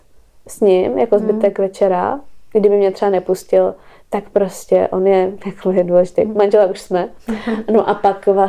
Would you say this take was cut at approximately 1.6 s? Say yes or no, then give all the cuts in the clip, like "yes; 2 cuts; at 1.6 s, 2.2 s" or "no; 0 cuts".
no; 0 cuts